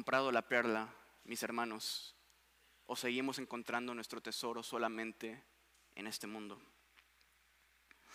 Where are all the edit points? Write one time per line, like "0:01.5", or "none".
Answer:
none